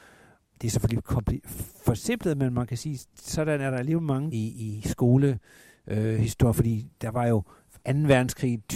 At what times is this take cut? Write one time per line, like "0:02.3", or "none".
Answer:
0:04.3